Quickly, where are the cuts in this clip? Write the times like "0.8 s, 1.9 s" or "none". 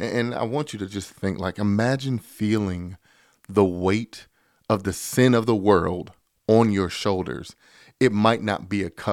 none